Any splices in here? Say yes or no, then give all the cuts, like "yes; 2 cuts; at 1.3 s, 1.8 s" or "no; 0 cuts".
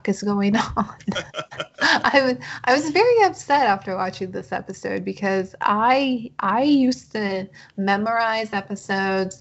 no; 0 cuts